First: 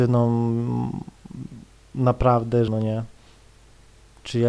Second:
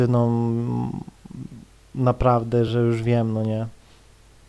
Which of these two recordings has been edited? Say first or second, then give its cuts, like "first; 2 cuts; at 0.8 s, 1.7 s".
first; 1 cut; at 2.7 s